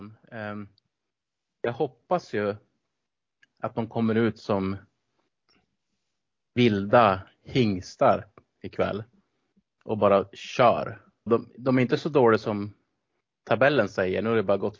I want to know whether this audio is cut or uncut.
cut